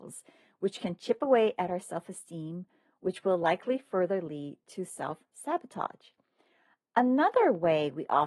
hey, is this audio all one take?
yes; 0 cuts

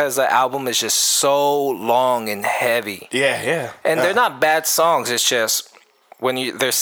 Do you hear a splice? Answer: no; 0 cuts

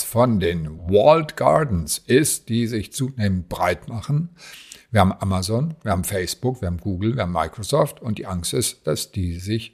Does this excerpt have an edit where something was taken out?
no; 0 cuts

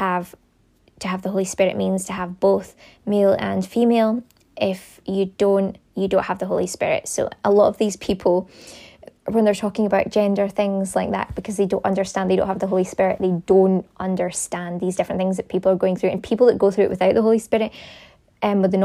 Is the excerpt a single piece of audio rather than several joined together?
yes; 0 cuts

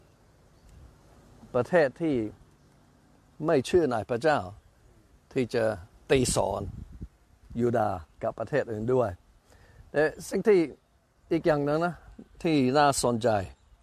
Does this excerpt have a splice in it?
no; 0 cuts

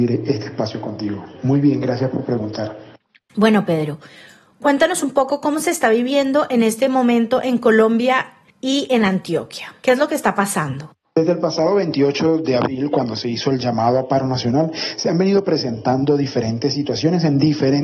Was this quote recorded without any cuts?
yes; 0 cuts

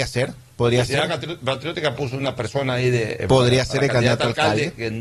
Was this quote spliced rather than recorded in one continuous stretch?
no; 0 cuts

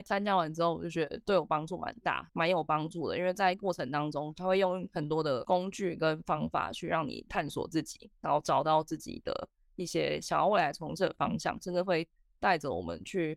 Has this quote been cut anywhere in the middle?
yes; 1 cut; at 2.3 s

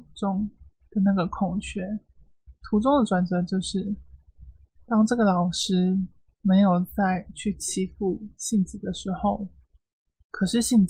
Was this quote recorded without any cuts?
yes; 0 cuts

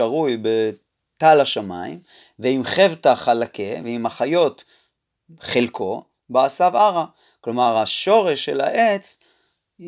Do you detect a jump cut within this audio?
no; 0 cuts

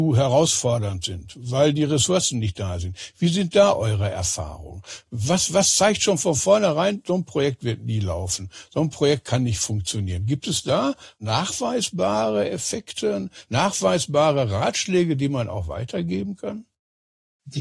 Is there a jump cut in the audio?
no; 0 cuts

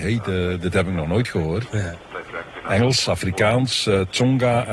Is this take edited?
no; 0 cuts

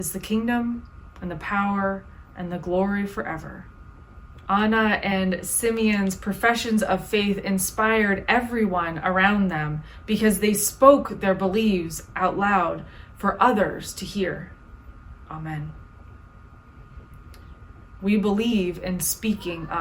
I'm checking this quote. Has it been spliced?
yes; 3 cuts; at 4.4 s, 15.3 s, 18.0 s

